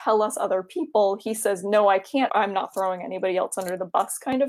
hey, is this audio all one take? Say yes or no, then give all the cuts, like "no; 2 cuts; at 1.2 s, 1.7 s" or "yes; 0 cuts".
no; 1 cut; at 2.3 s